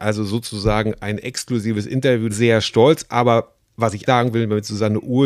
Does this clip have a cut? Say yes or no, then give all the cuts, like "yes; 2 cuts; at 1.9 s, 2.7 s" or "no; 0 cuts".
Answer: yes; 2 cuts; at 2.3 s, 4.1 s